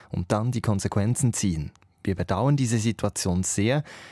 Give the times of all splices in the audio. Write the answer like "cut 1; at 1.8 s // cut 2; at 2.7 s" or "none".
none